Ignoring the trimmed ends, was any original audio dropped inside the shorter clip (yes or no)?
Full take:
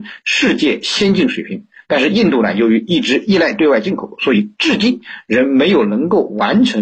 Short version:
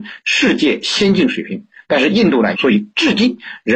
yes